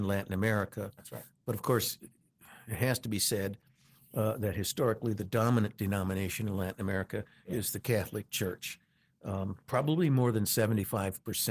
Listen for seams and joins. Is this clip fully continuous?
yes; 0 cuts

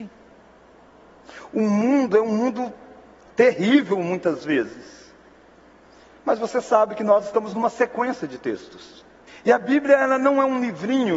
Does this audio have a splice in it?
yes; 2 cuts; at 6.1 s, 9.3 s

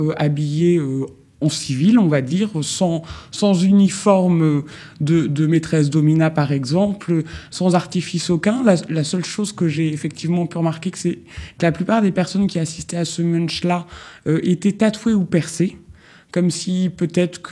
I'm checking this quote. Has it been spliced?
no; 0 cuts

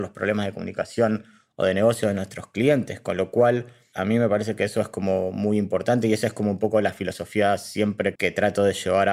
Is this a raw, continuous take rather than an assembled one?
no; 1 cut; at 8.2 s

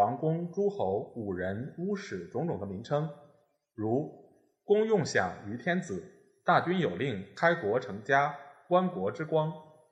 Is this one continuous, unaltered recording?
yes; 0 cuts

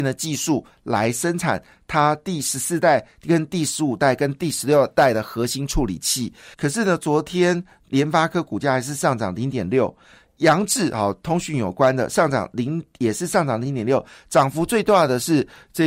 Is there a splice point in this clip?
yes; 1 cut; at 6.5 s

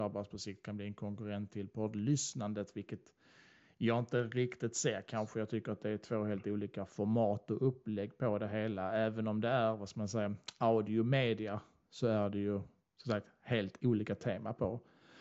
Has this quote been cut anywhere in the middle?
no; 0 cuts

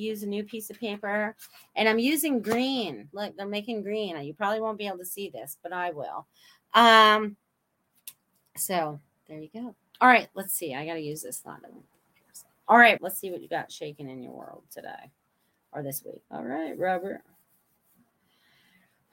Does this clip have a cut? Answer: yes; 2 cuts; at 13.0 s, 16.2 s

